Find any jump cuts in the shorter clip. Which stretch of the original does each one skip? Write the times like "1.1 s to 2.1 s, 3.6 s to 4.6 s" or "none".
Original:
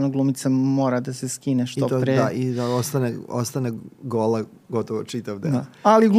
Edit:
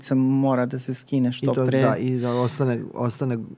none